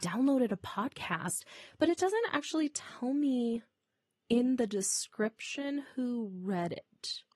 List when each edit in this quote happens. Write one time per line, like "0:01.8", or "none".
none